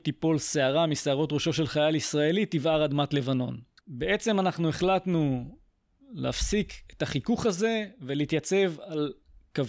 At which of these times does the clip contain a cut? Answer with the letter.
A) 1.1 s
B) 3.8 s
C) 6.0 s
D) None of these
B